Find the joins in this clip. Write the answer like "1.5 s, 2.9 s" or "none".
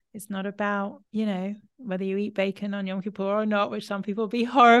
1.1 s